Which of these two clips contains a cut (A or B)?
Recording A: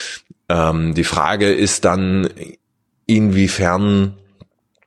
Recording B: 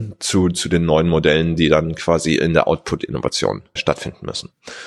B